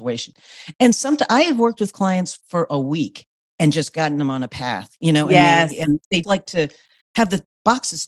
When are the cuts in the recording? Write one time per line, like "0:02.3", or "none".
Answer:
0:06.2